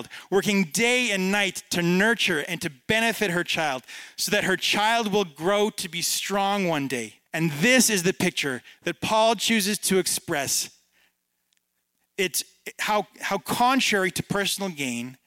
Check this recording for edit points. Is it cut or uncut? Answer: cut